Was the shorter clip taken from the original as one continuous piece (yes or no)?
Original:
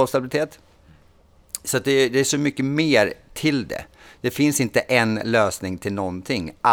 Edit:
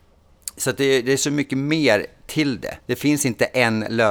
no